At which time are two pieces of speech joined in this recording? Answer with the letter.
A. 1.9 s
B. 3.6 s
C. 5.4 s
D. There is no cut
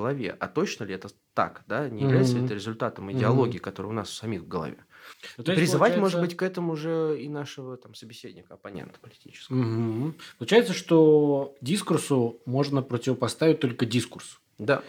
D